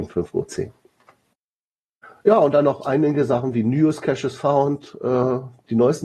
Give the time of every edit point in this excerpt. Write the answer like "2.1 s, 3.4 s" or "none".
none